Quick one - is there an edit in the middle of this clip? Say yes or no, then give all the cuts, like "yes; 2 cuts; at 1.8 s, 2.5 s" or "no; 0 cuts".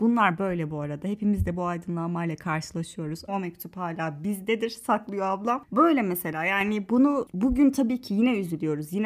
yes; 1 cut; at 3.3 s